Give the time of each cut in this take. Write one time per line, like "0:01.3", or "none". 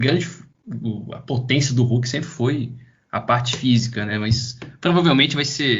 none